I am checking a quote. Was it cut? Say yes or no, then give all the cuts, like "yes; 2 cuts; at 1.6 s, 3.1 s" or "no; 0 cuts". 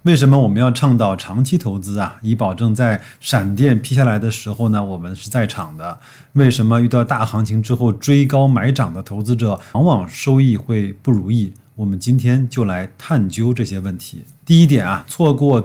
yes; 1 cut; at 9.7 s